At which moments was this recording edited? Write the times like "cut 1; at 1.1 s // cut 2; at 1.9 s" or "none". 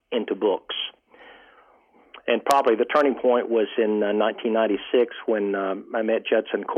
none

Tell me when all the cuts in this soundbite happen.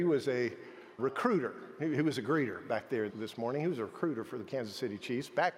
cut 1; at 1.0 s // cut 2; at 3.1 s

